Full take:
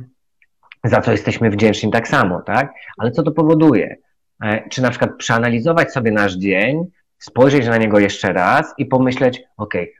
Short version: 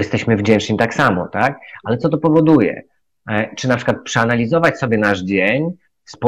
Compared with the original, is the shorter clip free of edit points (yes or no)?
yes